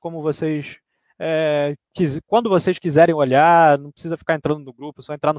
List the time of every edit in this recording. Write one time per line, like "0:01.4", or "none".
none

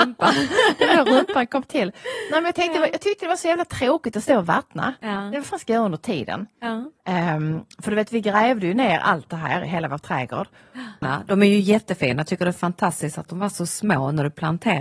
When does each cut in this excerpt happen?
0:11.0

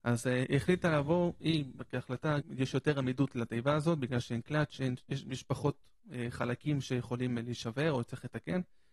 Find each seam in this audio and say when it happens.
0:02.4

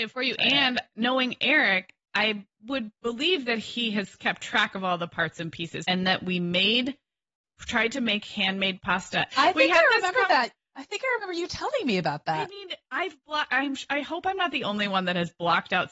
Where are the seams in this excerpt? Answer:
0:05.8
0:09.3

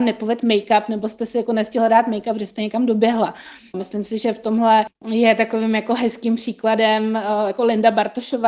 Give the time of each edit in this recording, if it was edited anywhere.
0:03.7
0:04.9

